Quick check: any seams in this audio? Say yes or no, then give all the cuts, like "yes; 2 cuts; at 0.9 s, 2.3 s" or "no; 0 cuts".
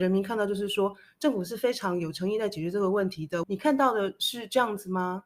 yes; 1 cut; at 3.4 s